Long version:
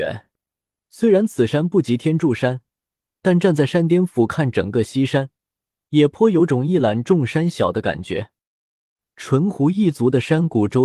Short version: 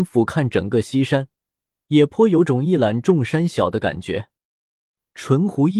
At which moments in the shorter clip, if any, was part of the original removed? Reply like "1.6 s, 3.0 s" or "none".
none